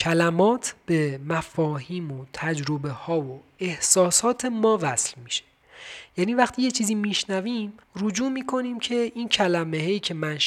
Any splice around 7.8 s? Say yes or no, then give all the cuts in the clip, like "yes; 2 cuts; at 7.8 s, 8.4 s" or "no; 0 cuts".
yes; 1 cut; at 7.8 s